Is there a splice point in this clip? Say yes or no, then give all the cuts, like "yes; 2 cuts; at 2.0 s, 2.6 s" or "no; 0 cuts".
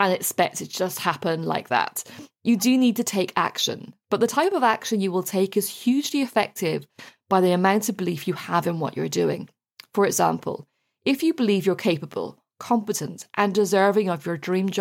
no; 0 cuts